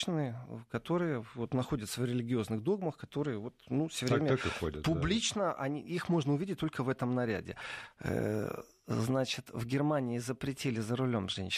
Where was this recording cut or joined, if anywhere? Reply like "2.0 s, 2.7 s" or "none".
none